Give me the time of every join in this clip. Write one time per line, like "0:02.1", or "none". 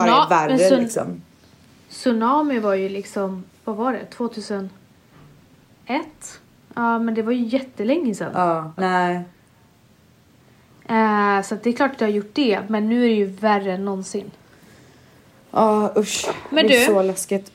0:06.6
0:08.8